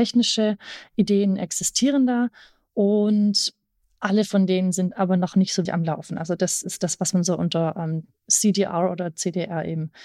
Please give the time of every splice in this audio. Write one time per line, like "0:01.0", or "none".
0:05.7

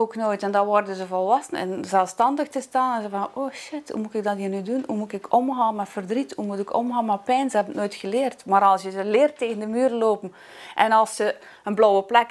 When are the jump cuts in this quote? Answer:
0:01.5

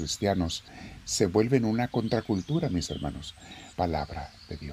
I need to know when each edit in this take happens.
0:03.7

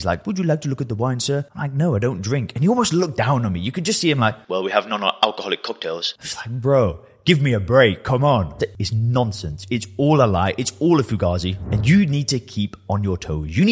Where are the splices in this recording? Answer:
0:08.6

